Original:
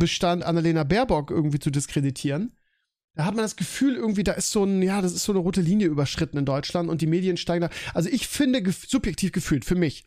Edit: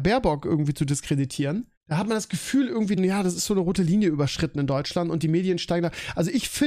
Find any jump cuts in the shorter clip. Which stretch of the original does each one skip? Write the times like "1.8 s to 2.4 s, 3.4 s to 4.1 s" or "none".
2.6 s to 3.0 s, 4.2 s to 4.8 s